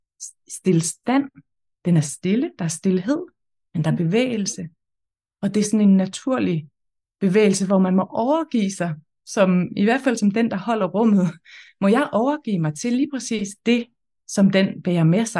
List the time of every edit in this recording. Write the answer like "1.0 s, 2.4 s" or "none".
none